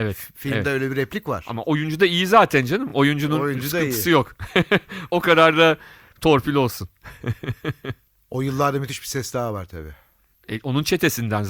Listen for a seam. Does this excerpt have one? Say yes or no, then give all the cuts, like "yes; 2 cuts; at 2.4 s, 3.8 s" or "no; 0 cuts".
no; 0 cuts